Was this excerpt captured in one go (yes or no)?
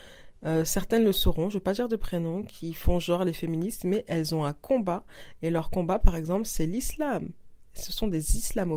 yes